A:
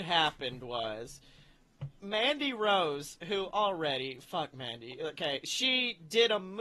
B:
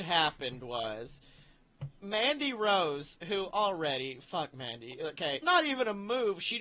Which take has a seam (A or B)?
B